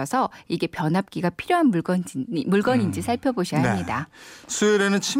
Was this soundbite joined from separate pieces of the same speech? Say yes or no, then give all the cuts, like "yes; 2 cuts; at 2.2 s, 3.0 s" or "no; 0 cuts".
no; 0 cuts